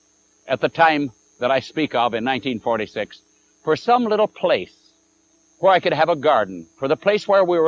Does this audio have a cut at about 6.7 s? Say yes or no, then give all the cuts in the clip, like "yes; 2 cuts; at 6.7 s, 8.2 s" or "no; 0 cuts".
no; 0 cuts